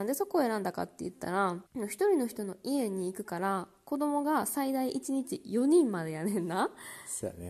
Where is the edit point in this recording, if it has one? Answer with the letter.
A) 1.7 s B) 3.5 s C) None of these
A